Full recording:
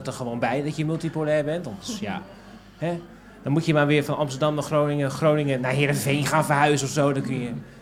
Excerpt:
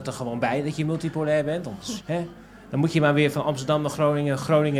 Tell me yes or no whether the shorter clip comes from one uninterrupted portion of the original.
no